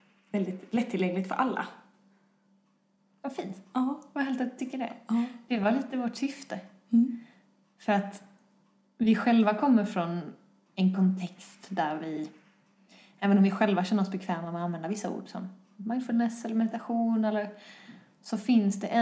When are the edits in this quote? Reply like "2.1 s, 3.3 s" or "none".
none